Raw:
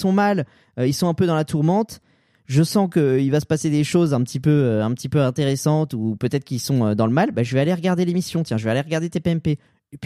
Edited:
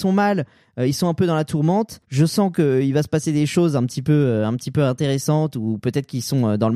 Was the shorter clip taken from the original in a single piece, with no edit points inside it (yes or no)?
no